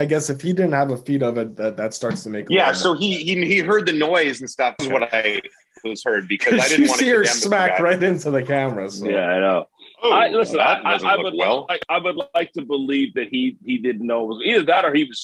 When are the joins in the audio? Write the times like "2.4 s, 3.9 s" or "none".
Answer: 4.8 s